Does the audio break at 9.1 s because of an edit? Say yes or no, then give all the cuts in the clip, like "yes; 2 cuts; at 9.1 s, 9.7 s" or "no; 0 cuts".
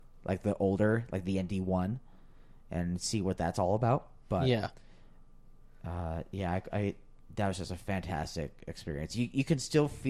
no; 0 cuts